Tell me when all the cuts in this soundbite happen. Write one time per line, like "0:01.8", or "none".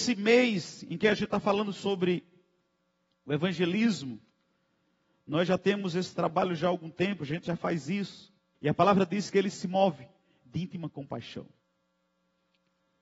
0:08.5